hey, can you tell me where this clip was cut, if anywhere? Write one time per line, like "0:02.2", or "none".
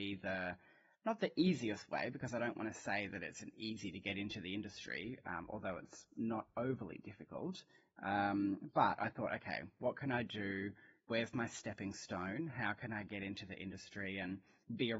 none